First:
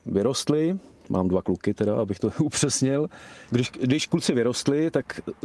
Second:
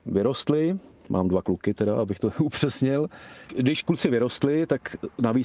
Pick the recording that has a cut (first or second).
second